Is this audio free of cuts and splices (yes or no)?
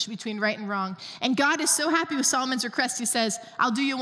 yes